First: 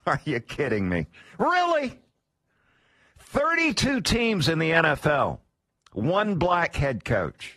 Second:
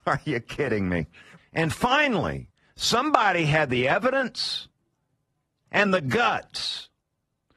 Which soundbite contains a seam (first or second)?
second